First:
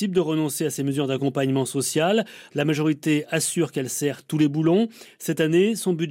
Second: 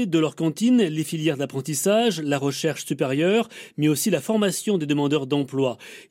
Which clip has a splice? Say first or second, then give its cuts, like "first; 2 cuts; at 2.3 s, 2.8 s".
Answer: first; 1 cut; at 2.5 s